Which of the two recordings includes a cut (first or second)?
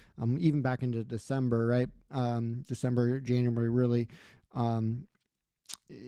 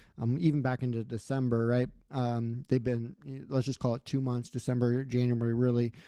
first